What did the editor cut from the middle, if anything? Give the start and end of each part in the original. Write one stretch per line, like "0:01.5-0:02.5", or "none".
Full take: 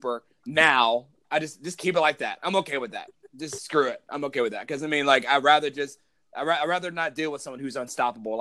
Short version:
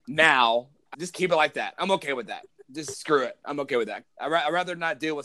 0:01.3-0:01.6
0:04.7-0:06.2